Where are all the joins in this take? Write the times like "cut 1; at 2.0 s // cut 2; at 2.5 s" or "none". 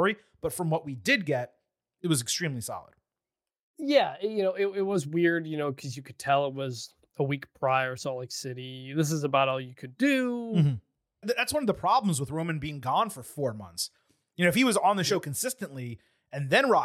cut 1; at 11.2 s